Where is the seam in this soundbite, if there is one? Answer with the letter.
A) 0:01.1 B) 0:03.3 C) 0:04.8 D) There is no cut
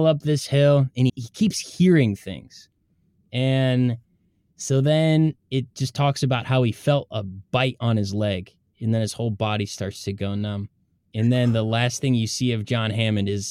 A